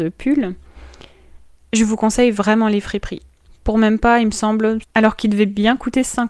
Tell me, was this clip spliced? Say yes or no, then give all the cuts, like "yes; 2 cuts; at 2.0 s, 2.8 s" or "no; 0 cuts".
yes; 2 cuts; at 3.5 s, 4.8 s